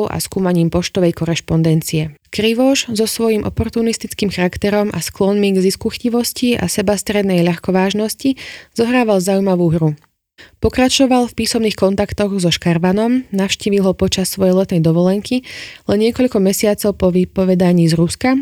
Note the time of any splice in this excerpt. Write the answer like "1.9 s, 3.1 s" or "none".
2.2 s